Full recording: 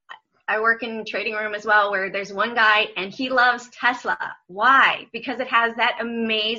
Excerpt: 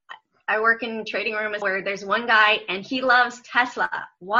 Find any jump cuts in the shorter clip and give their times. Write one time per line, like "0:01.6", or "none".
0:01.6